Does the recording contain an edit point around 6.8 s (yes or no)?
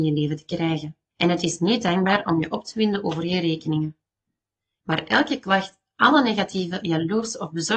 no